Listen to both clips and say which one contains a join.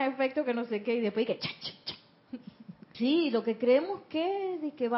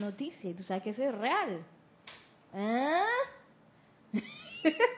first; 1 cut; at 2.9 s

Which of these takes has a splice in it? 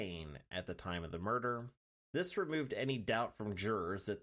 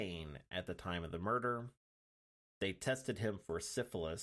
first; 1 cut; at 1.9 s

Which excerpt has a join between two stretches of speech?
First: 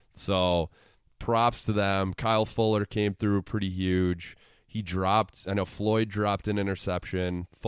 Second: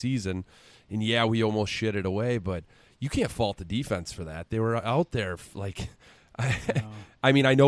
first; 1 cut; at 1.1 s

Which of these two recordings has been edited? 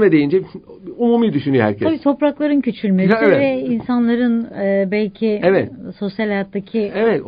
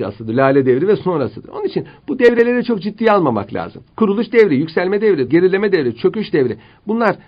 second; 2 cuts; at 3.9 s, 5.3 s

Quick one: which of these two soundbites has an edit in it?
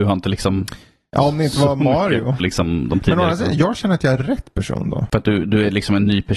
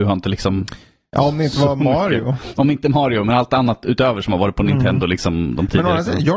first; 1 cut; at 2.4 s

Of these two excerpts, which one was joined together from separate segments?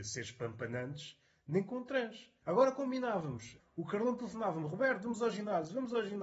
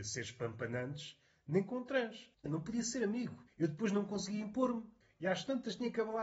second; 1 cut; at 2.3 s

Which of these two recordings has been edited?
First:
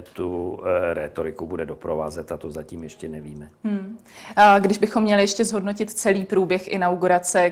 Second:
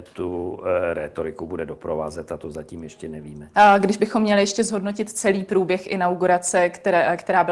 second; 1 cut; at 3.5 s

